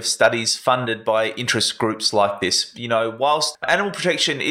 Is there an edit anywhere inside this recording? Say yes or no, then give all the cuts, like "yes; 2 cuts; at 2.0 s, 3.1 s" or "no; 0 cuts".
no; 0 cuts